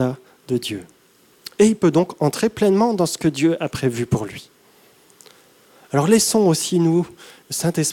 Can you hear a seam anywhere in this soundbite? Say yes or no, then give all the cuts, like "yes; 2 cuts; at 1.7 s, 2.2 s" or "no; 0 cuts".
no; 0 cuts